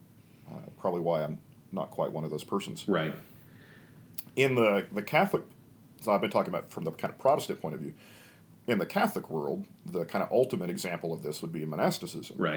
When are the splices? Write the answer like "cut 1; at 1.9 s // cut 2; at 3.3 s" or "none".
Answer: none